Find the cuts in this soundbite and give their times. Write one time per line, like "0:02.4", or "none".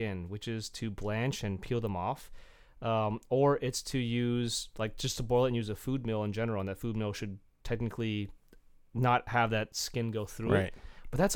none